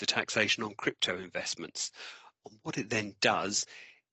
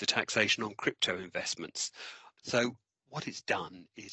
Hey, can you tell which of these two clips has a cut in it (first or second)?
second